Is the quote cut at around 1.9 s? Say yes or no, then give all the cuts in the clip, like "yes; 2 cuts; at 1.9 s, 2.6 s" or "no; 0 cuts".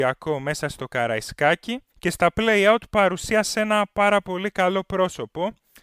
yes; 1 cut; at 1.9 s